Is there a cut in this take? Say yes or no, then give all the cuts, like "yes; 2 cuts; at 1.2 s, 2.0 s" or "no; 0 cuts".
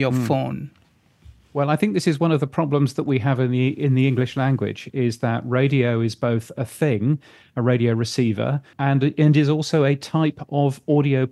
yes; 1 cut; at 8.7 s